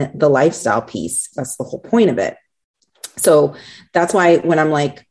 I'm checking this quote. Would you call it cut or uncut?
cut